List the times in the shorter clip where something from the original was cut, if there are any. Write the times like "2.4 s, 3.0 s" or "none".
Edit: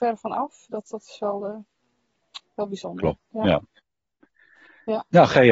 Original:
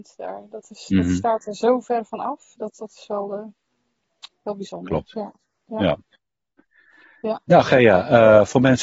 3.2 s